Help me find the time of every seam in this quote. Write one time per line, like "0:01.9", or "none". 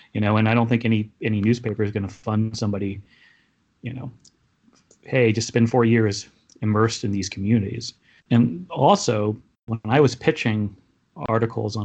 0:08.2
0:09.5